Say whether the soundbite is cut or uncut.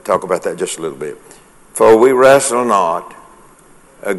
uncut